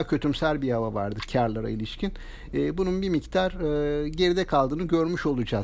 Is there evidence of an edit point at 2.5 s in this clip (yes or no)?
no